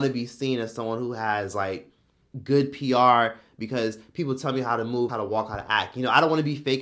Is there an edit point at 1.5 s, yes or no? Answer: no